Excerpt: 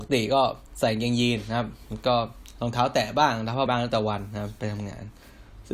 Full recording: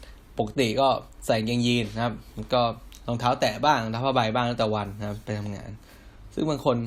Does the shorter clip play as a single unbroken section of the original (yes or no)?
no